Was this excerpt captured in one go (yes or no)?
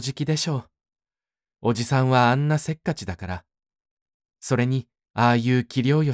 no